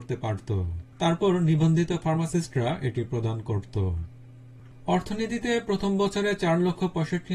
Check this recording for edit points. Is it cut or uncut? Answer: cut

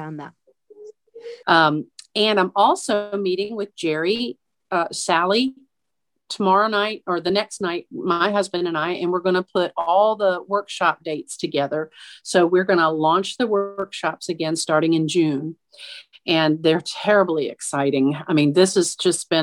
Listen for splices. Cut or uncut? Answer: cut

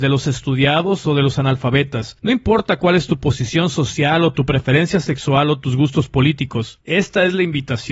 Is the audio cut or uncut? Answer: cut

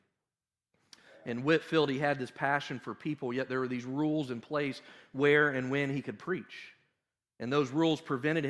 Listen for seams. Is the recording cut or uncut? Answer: uncut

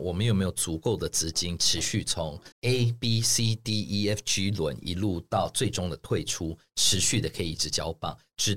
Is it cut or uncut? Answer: cut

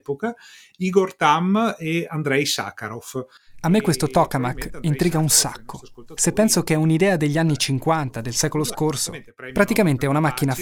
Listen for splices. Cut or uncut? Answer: uncut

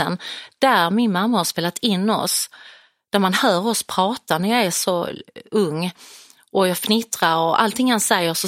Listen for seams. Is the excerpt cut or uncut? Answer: uncut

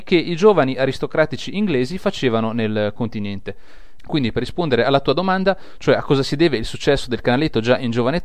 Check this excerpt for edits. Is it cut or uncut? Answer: cut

